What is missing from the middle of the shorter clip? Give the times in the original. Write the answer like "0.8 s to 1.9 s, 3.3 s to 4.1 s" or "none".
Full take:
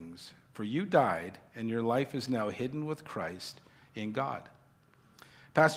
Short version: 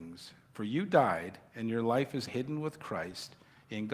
2.3 s to 2.5 s